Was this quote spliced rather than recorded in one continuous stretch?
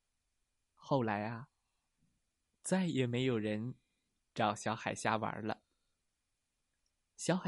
no; 0 cuts

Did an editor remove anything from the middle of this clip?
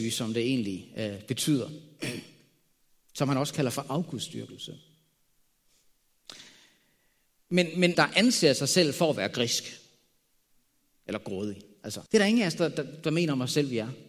yes; 2 cuts; at 7.9 s, 12.1 s

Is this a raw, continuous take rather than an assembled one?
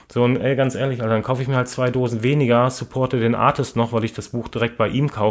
yes; 0 cuts

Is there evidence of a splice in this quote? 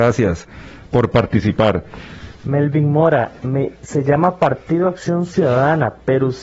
yes; 2 cuts; at 2.4 s, 3.7 s

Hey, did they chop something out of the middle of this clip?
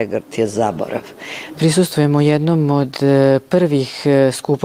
yes; 1 cut; at 1.5 s

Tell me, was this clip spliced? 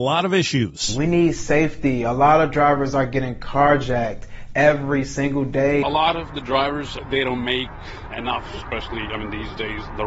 yes; 1 cut; at 8.1 s

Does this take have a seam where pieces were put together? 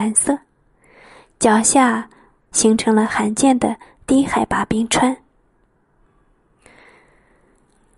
yes; 1 cut; at 2.4 s

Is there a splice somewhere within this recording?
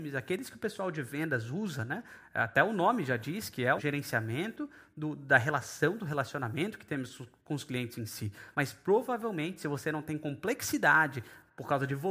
yes; 2 cuts; at 3.8 s, 8.5 s

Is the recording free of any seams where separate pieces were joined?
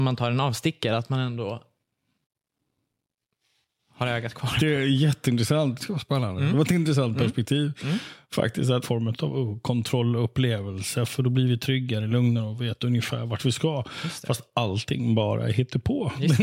no; 2 cuts; at 5.8 s, 8.8 s

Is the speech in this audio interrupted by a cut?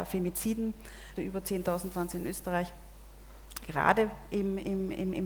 yes; 2 cuts; at 1.2 s, 3.6 s

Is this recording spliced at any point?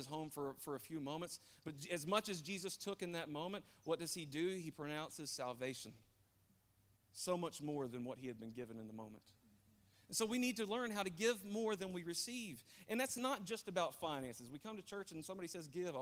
no; 0 cuts

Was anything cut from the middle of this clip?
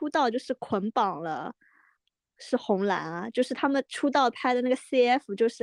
no; 0 cuts

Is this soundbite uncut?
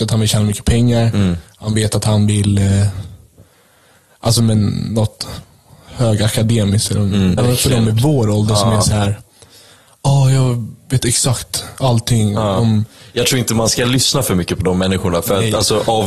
no; 1 cut; at 7.4 s

